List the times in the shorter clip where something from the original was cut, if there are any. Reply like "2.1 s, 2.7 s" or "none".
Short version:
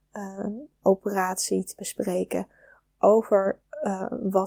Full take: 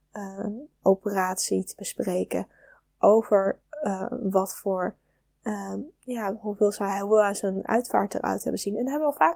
none